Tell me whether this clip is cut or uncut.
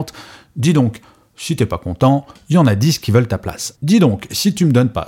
cut